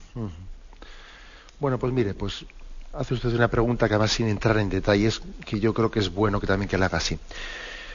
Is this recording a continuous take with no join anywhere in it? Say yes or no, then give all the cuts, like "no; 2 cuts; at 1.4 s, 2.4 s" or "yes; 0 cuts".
yes; 0 cuts